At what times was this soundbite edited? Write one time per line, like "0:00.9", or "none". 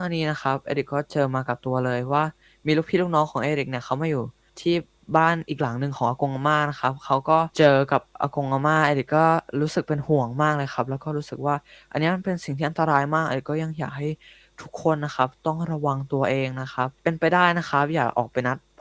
0:07.5
0:17.0